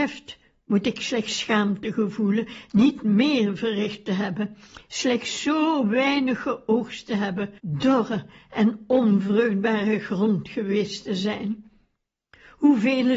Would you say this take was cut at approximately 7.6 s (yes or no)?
yes